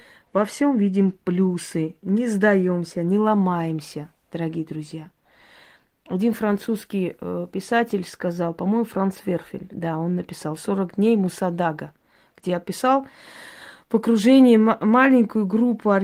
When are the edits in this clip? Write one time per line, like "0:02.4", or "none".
none